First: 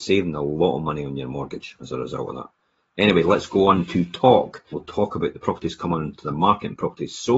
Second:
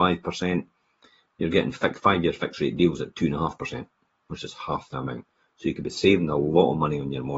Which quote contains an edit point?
first; 1 cut; at 4.7 s

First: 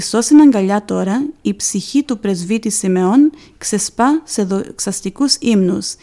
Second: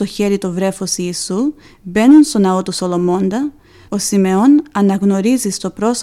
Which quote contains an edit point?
second; 1 cut; at 3.9 s

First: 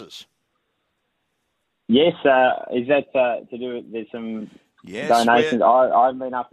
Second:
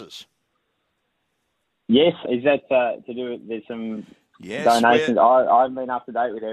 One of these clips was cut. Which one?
second; 1 cut; at 2.2 s

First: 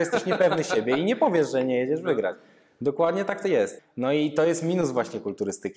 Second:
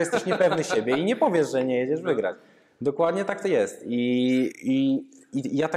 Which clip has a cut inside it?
first; 1 cut; at 3.8 s

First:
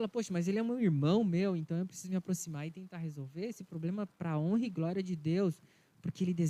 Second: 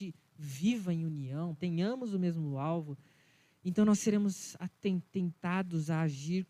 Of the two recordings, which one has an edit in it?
second; 1 cut; at 1.6 s

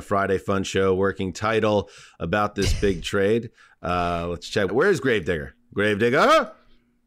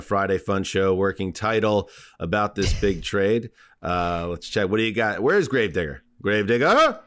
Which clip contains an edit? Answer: first; 1 cut; at 4.7 s

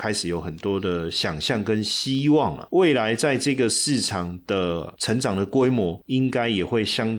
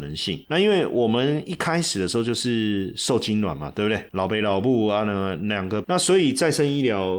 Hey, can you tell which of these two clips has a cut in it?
second; 1 cut; at 5.8 s

